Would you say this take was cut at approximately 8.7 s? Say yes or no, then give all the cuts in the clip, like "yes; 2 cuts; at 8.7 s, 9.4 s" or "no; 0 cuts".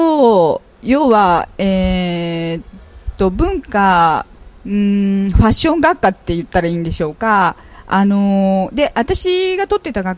no; 1 cut; at 4.6 s